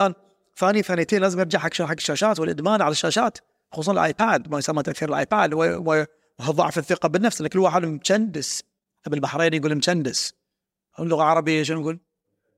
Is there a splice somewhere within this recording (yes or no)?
no